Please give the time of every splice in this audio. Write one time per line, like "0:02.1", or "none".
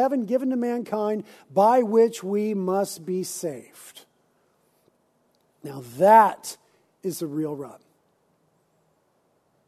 none